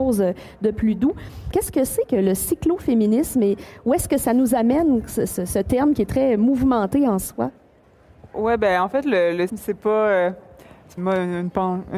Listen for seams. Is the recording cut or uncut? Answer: cut